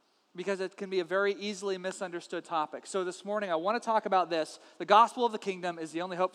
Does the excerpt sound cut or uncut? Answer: uncut